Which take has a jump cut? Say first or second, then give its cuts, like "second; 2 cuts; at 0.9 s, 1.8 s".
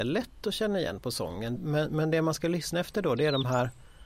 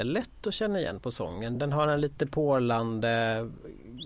first; 1 cut; at 1.6 s